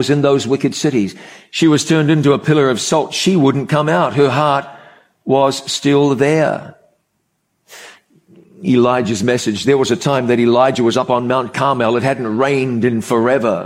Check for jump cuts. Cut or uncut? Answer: uncut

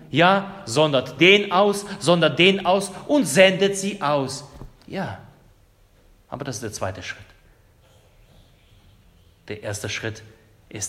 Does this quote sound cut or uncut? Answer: uncut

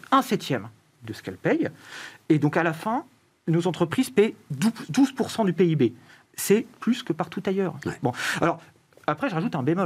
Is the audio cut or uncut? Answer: uncut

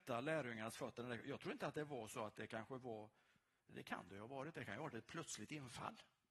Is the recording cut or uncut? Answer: uncut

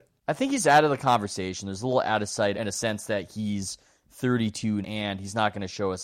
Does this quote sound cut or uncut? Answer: cut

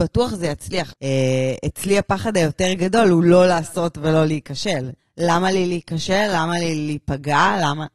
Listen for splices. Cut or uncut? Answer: cut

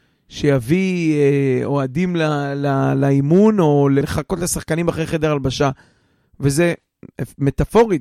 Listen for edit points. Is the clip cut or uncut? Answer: cut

